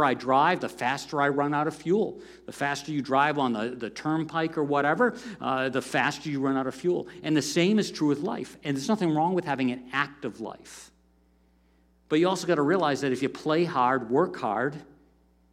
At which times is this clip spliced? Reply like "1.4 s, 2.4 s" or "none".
none